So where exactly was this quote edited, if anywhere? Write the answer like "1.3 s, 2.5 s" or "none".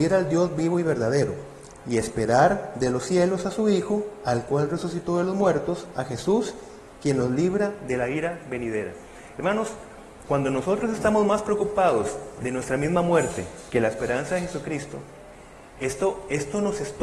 10.3 s